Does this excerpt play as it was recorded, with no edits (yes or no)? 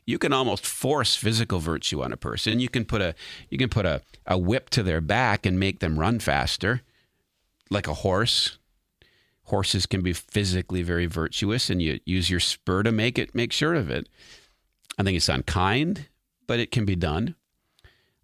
yes